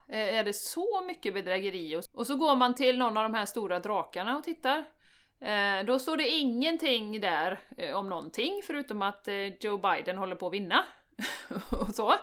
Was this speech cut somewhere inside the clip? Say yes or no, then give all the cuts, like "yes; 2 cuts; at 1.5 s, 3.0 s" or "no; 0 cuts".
yes; 1 cut; at 2.1 s